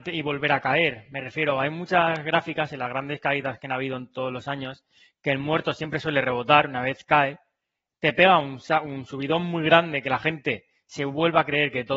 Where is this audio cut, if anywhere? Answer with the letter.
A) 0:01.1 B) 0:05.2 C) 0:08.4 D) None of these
D